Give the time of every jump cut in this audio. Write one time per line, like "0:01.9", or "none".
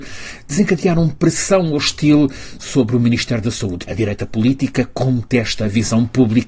0:03.8